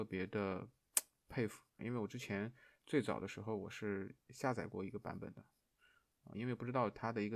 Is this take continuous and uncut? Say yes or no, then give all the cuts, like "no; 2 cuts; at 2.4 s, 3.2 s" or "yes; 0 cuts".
no; 2 cuts; at 1.8 s, 6.3 s